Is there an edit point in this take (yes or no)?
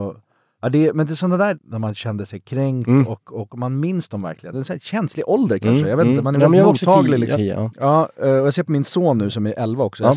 yes